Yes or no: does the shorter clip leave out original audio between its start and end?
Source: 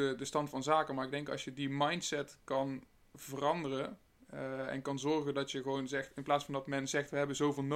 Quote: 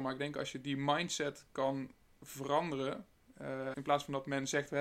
yes